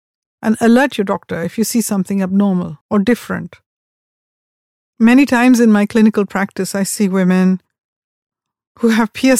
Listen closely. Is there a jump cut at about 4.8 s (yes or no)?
no